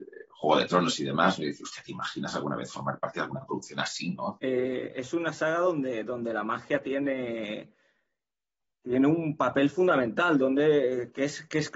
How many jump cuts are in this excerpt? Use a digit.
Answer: 1